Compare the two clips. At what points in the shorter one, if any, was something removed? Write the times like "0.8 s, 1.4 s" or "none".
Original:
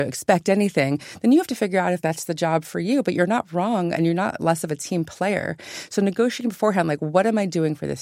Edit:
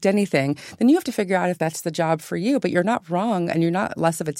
none